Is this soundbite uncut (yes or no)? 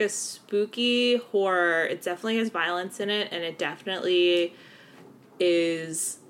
yes